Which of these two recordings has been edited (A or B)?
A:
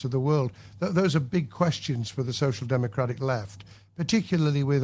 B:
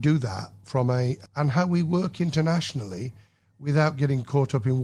B